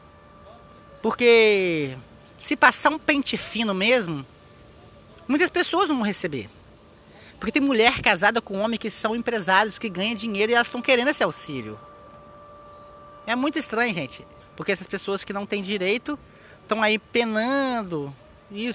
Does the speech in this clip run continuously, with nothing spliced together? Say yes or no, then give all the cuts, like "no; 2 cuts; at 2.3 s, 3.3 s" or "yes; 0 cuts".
no; 1 cut; at 14.4 s